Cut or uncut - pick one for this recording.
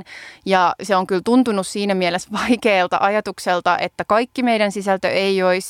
uncut